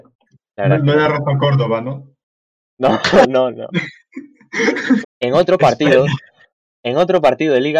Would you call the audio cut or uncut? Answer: cut